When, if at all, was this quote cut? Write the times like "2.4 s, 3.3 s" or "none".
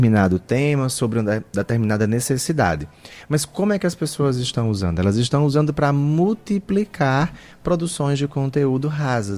none

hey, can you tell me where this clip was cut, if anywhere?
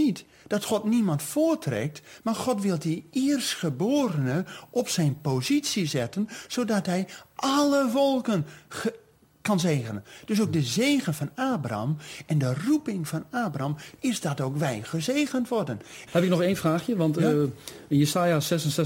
14.0 s, 16.1 s

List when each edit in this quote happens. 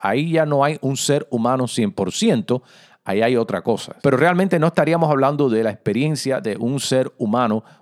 4.0 s

